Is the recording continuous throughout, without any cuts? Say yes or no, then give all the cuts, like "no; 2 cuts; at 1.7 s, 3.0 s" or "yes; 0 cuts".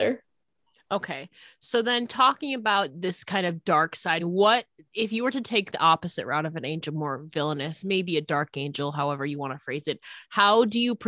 no; 2 cuts; at 4.2 s, 5.7 s